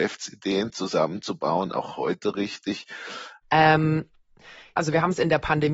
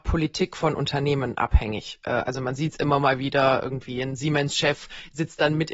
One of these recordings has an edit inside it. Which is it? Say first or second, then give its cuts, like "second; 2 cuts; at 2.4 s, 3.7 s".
first; 2 cuts; at 3.4 s, 4.8 s